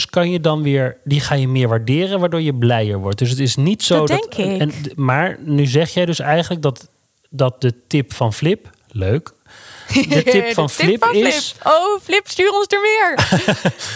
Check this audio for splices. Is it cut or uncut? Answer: uncut